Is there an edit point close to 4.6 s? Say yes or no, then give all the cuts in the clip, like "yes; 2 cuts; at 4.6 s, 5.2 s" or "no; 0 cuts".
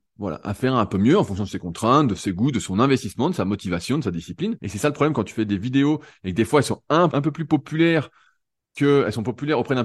yes; 2 cuts; at 4.6 s, 7.1 s